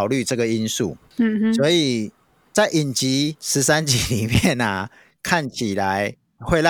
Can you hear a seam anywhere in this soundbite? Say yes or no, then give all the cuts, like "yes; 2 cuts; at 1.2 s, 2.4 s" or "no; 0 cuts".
no; 0 cuts